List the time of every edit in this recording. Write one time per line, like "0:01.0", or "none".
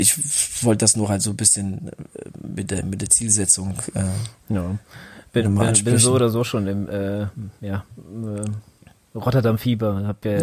none